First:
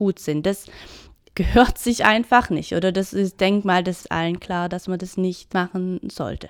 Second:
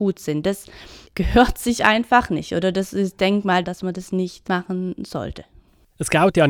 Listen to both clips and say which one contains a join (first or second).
second